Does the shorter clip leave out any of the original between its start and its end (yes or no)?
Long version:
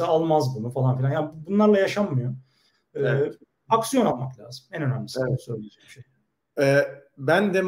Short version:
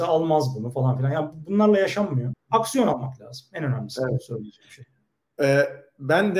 yes